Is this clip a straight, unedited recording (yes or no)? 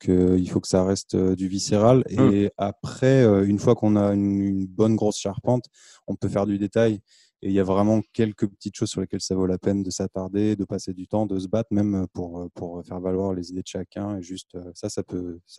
yes